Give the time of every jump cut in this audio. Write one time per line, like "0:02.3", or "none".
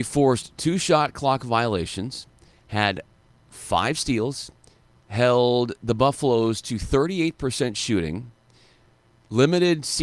0:05.0